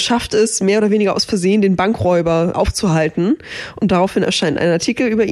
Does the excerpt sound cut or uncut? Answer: cut